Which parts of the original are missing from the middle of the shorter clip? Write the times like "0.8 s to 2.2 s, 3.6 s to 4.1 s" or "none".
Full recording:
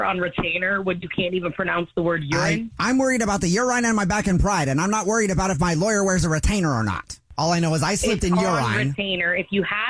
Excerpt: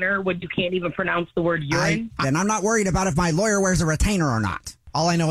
2.8 s to 4.6 s